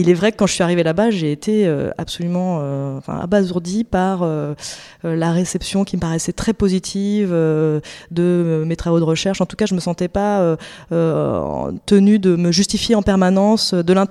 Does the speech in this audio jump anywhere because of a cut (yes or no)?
no